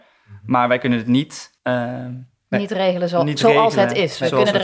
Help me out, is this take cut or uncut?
cut